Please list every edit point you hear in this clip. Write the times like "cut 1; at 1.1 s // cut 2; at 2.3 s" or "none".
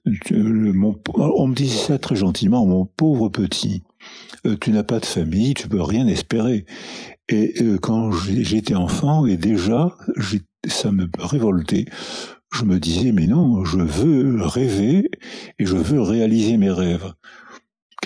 cut 1; at 5.5 s